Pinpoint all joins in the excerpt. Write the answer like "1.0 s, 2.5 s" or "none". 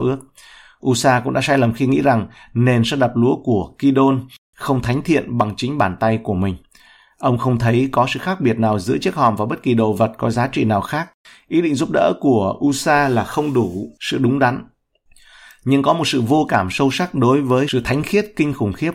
none